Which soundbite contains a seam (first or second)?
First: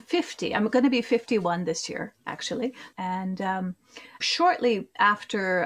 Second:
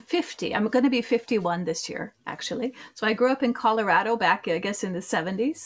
first